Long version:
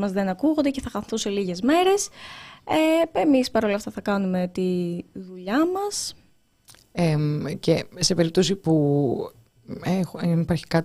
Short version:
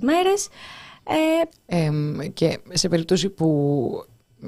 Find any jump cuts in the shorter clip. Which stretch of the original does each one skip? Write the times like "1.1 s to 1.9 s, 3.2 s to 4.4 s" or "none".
3.1 s to 6.8 s

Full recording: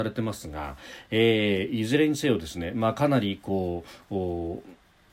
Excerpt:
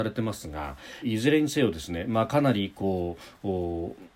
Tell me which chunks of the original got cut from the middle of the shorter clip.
1.0 s to 1.7 s

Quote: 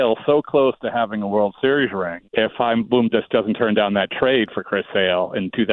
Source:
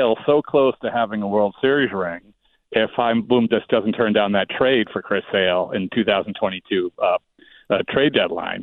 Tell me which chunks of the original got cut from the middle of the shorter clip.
2.3 s to 2.7 s

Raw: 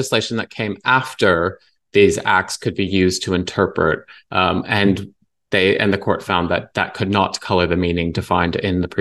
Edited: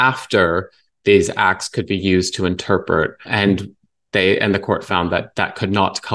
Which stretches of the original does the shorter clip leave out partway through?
4.1 s to 4.6 s

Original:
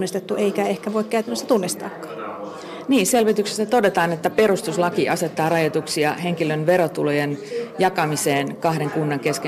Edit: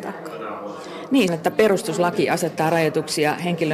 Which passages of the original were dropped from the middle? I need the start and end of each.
3.1 s to 4.1 s

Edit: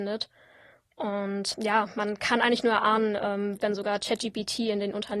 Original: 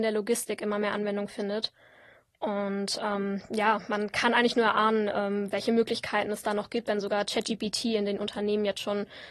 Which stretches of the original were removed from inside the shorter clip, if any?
3.0 s to 3.5 s, 5.5 s to 6.8 s

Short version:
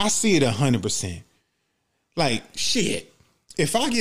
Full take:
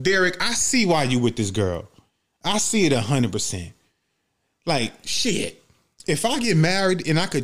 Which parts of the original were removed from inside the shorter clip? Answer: none

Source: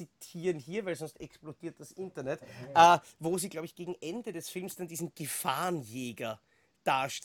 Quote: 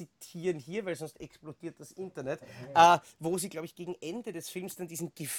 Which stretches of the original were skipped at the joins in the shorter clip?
none

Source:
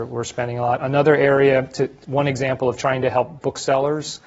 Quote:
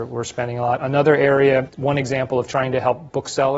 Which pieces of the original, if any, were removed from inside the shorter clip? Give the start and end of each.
1.7 s to 2.0 s

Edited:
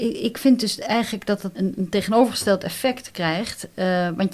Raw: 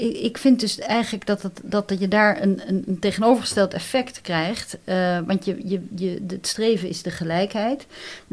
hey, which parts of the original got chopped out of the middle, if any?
1.5 s to 2.6 s

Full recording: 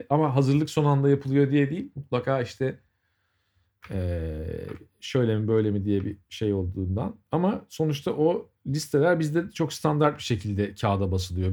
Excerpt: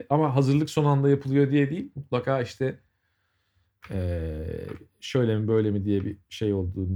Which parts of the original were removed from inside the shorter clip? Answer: none

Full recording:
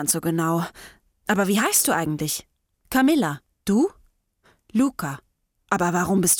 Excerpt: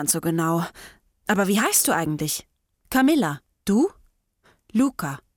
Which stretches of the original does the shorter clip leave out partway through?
none

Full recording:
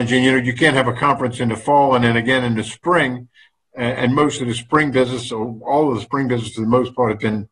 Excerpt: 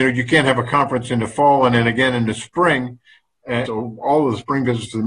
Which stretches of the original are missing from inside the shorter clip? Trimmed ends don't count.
4.0 s to 5.3 s

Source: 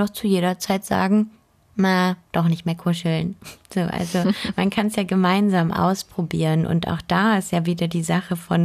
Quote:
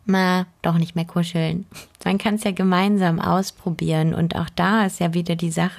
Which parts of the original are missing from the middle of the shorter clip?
3.7 s to 4.5 s

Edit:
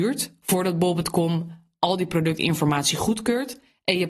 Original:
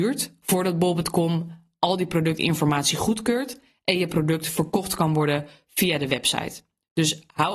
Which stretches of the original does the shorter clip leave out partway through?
none

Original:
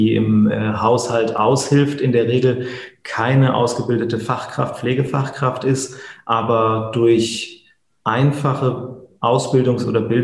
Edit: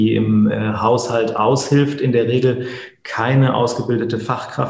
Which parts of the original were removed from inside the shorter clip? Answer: none

